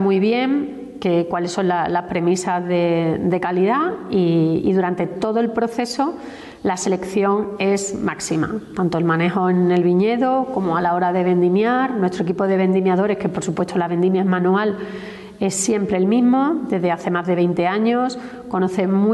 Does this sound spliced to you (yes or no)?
no